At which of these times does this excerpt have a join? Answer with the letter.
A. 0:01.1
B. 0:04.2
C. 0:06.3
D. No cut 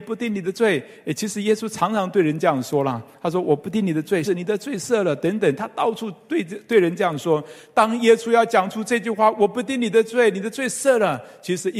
B